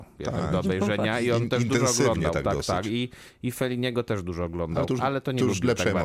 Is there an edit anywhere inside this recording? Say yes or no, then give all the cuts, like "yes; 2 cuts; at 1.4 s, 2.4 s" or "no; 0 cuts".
no; 0 cuts